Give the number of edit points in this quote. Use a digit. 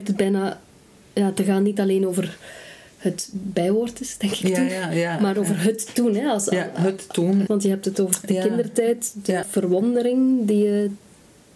2